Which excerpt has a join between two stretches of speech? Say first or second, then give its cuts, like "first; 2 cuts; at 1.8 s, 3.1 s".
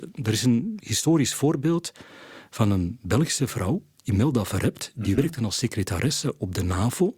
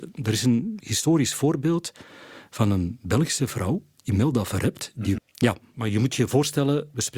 second; 1 cut; at 5.2 s